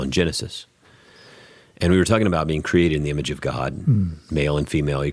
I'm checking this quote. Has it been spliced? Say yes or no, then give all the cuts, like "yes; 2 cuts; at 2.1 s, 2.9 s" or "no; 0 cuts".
no; 0 cuts